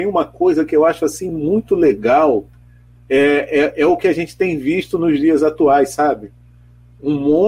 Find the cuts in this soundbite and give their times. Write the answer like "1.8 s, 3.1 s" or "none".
none